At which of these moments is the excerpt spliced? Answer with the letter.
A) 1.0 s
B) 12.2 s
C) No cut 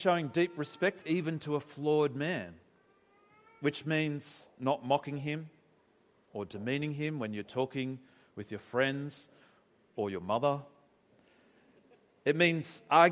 A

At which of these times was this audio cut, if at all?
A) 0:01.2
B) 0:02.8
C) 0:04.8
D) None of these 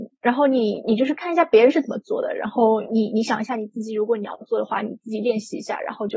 D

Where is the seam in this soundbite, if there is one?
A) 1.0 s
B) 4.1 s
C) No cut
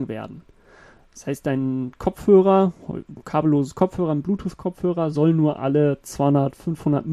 C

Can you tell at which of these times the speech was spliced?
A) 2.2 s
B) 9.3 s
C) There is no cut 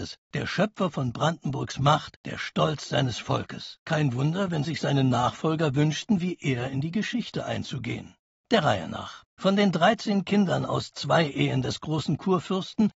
A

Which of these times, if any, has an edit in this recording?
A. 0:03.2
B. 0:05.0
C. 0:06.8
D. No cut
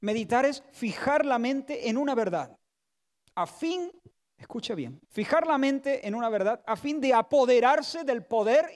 B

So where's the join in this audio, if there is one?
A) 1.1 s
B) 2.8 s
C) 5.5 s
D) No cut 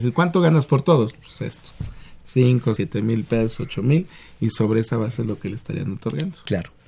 B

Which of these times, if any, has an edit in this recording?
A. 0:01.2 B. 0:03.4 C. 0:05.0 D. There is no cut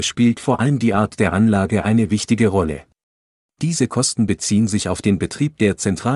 B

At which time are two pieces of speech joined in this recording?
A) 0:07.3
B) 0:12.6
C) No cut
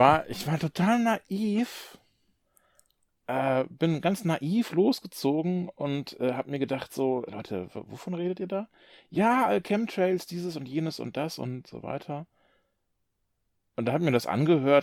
A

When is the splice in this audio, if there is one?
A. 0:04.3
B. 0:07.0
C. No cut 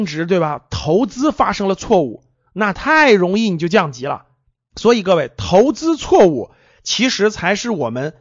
C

